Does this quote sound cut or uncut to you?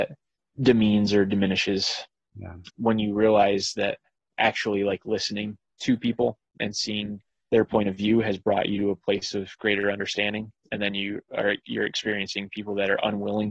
cut